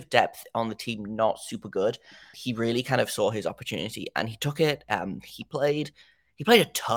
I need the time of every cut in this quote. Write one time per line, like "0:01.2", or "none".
0:02.3